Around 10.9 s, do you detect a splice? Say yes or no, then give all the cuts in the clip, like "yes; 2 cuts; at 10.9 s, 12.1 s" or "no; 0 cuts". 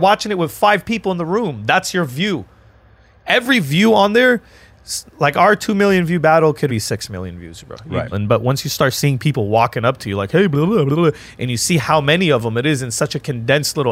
no; 2 cuts; at 6.7 s, 8.1 s